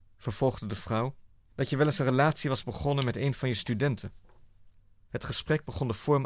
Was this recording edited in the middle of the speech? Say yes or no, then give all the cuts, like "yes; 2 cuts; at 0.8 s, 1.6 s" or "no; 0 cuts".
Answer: no; 0 cuts